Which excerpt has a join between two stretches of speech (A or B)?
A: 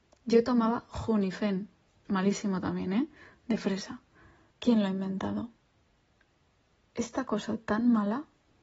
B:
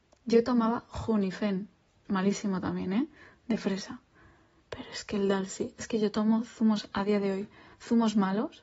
A